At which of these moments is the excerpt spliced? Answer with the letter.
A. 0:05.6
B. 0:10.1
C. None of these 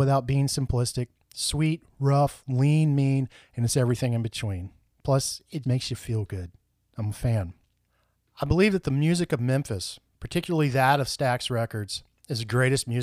A